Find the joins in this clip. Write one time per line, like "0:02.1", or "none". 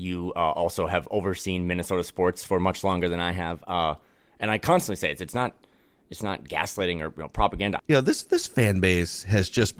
0:07.8